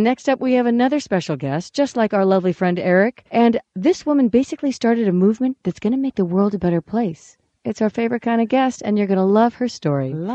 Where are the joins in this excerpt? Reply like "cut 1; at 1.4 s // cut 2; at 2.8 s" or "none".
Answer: cut 1; at 3.3 s

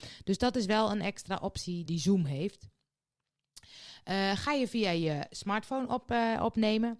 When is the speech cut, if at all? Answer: cut 1; at 1.9 s

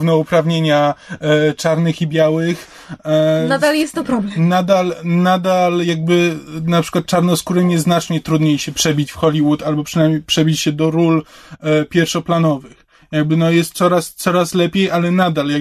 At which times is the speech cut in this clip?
none

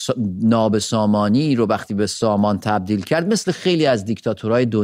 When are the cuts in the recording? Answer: none

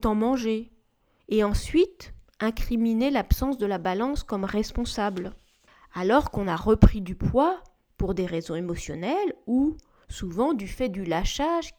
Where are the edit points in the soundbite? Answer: cut 1; at 1.2 s

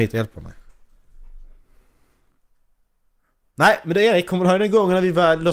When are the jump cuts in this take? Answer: none

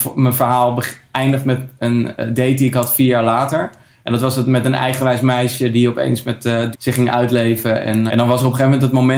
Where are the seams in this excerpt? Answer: cut 1; at 6.7 s // cut 2; at 8.1 s

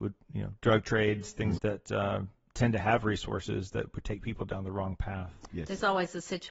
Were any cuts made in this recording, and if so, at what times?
cut 1; at 1.6 s // cut 2; at 5.5 s

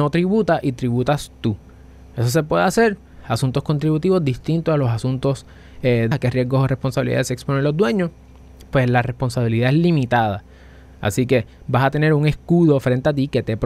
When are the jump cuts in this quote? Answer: cut 1; at 6.1 s

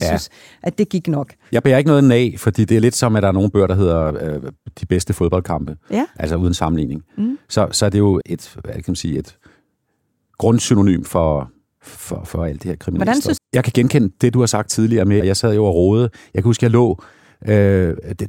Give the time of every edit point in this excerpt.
cut 1; at 8.2 s // cut 2; at 13.4 s // cut 3; at 15.2 s

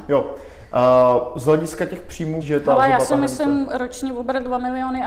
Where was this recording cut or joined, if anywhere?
cut 1; at 2.4 s

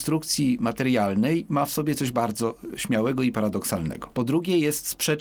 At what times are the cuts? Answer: none

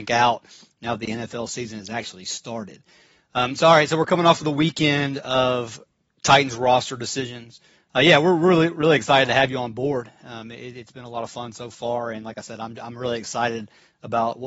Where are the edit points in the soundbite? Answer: cut 1; at 7.7 s

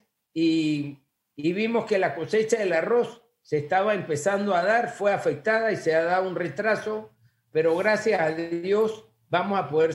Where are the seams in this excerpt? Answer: none

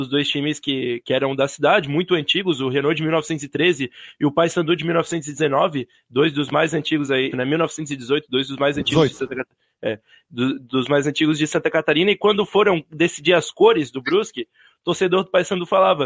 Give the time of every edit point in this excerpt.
cut 1; at 7.3 s

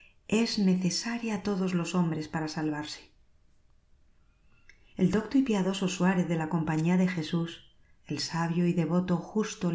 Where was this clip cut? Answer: none

